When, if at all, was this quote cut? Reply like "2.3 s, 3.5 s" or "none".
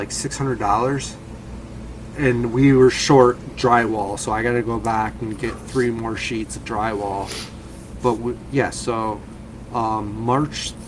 none